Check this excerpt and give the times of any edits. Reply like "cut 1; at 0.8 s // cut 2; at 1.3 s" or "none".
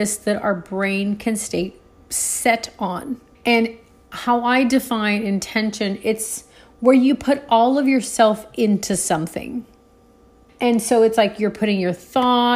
cut 1; at 3.3 s // cut 2; at 10.5 s